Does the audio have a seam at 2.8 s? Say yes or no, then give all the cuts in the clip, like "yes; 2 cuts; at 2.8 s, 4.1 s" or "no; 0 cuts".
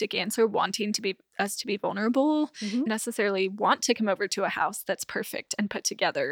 yes; 1 cut; at 2.8 s